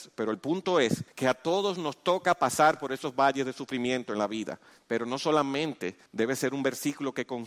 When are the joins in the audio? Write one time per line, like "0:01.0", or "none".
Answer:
0:01.1
0:04.7
0:06.1